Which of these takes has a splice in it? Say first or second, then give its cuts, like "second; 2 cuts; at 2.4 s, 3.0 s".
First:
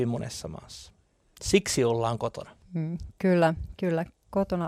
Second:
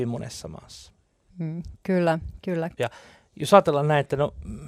second; 2 cuts; at 1.3 s, 2.8 s